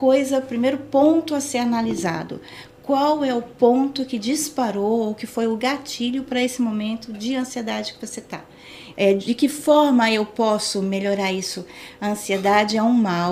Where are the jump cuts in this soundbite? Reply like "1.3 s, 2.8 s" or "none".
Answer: 8.9 s, 12.0 s